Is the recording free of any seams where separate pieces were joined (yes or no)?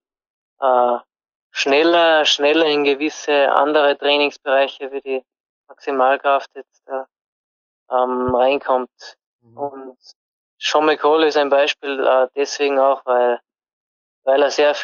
yes